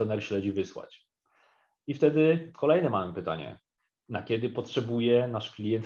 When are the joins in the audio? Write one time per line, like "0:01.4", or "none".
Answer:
none